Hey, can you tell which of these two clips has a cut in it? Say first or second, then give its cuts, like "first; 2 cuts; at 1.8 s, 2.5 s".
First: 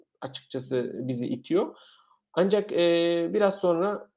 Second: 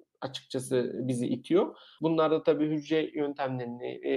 second; 1 cut; at 2.0 s